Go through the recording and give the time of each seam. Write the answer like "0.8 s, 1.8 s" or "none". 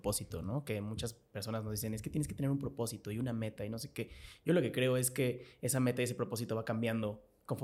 none